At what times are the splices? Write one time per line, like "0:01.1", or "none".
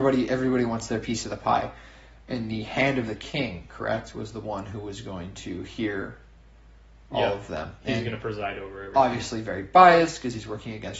none